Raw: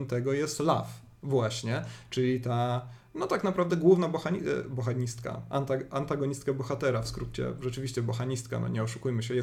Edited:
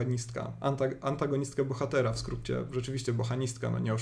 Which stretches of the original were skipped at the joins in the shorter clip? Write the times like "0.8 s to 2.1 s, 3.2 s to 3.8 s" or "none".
none